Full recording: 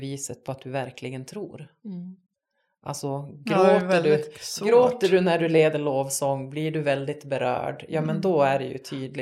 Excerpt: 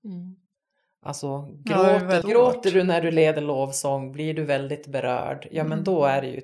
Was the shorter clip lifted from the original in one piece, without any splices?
no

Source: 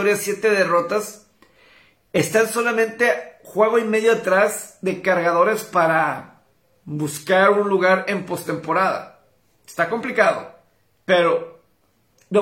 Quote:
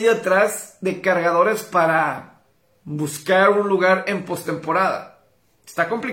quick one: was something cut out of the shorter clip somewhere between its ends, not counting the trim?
no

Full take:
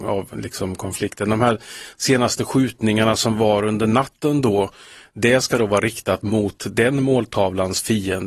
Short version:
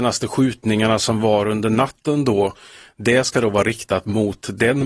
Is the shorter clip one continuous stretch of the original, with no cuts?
yes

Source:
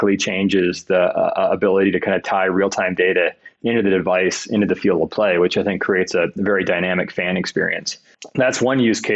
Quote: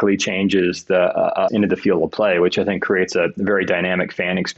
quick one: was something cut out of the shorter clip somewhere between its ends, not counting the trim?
yes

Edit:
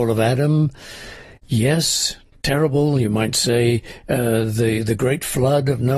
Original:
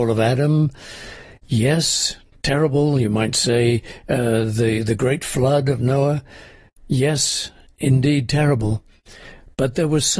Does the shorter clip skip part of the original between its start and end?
no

